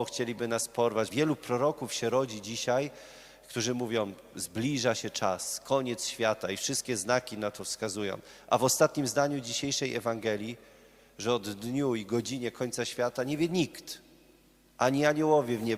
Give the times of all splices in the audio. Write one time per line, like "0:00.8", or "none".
0:01.1

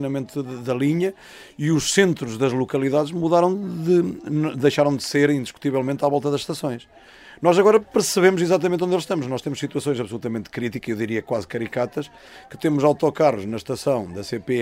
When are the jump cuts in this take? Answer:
none

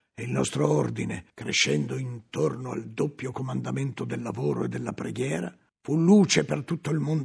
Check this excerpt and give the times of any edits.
none

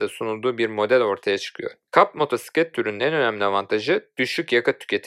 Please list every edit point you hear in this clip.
0:01.9

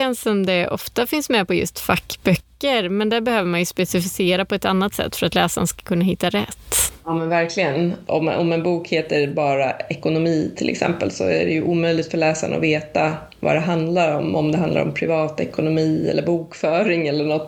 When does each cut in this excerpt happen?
none

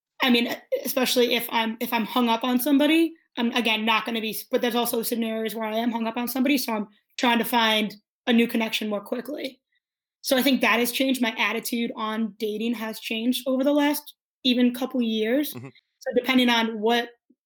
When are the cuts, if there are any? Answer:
none

